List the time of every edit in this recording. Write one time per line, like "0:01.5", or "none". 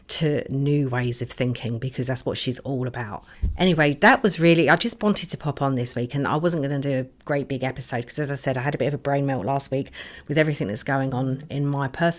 none